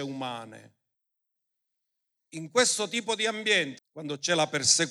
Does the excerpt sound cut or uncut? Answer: cut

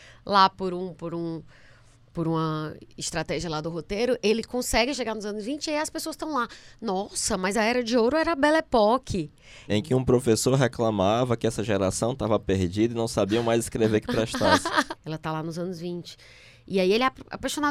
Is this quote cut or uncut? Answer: cut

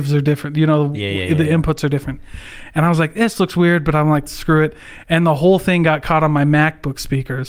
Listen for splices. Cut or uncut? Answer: cut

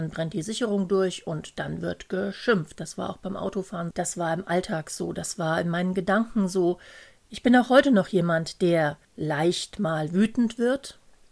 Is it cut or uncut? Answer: cut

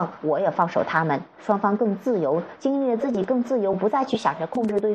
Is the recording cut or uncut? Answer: uncut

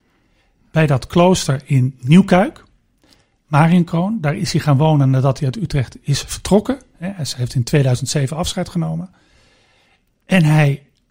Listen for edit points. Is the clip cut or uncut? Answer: uncut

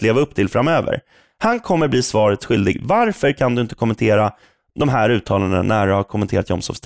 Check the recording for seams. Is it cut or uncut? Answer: uncut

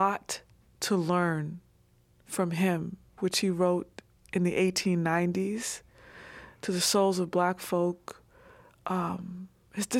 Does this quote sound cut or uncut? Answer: cut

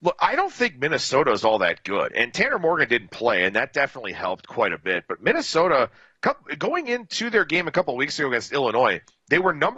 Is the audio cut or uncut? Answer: uncut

